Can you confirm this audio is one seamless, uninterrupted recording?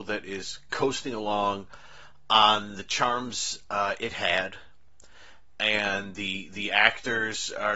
yes; 0 cuts

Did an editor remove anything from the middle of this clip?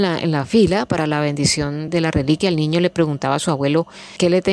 yes; 1 cut; at 1.9 s

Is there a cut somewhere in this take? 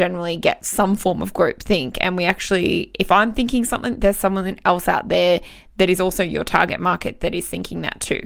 no; 0 cuts

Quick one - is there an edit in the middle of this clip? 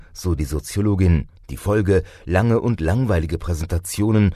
yes; 1 cut; at 1.4 s

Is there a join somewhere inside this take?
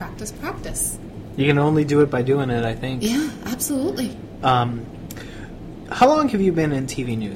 no; 0 cuts

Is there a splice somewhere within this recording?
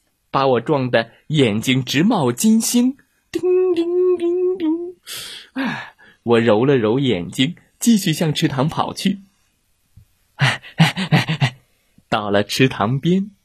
no; 0 cuts

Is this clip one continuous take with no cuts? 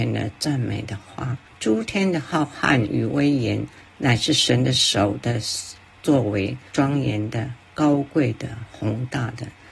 no; 2 cuts; at 1.5 s, 6.7 s

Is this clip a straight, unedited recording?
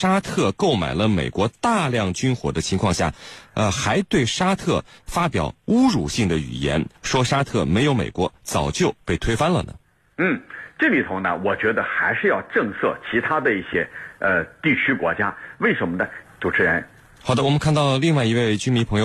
no; 1 cut; at 16.2 s

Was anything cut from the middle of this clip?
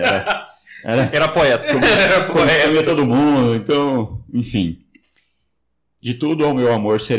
no; 0 cuts

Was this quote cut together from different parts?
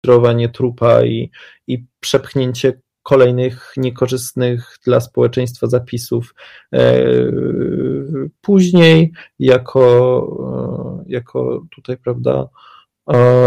no; 0 cuts

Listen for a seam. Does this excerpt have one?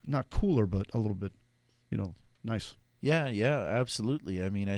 no; 0 cuts

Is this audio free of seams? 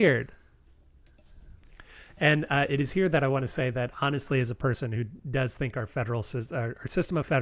yes; 0 cuts

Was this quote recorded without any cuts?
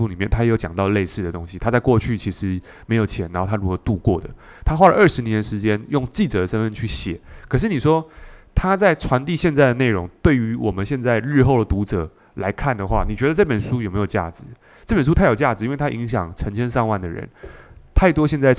yes; 0 cuts

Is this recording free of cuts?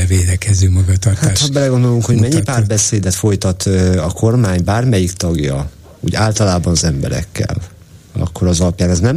yes; 0 cuts

